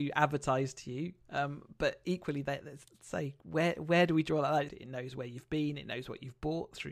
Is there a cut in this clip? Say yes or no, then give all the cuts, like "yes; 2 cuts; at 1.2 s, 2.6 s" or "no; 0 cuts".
yes; 1 cut; at 4.7 s